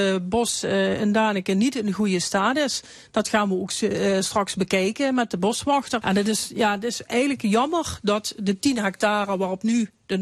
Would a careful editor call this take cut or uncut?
cut